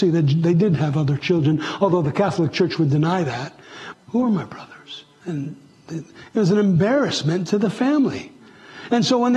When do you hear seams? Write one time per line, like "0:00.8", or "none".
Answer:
0:03.9
0:05.2